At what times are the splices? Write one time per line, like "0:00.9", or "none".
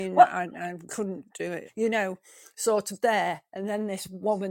0:01.7